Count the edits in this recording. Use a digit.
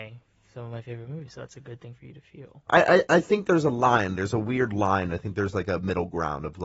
1